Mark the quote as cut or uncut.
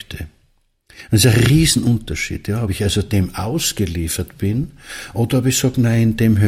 uncut